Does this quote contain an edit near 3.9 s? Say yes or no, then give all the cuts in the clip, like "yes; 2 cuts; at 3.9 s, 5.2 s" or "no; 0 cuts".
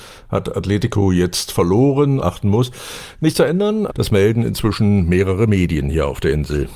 yes; 2 cuts; at 2.2 s, 3.9 s